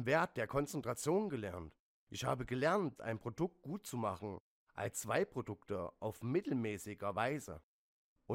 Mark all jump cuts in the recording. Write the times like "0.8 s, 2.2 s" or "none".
3.0 s